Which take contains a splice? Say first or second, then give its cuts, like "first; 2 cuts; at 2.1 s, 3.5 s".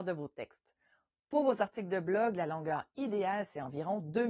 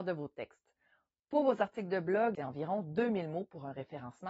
second; 1 cut; at 2.4 s